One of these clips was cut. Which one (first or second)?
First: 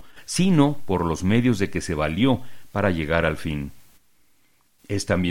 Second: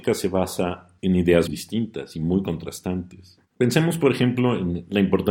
second